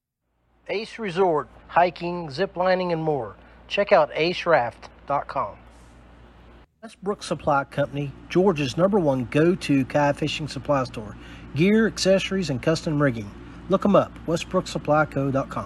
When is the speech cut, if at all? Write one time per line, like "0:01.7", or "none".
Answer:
0:01.6